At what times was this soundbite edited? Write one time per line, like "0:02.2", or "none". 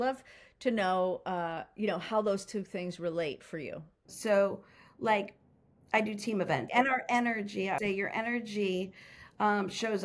0:04.1
0:06.7
0:07.8